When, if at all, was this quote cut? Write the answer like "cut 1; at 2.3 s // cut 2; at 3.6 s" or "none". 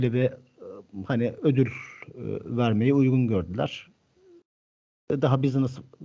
none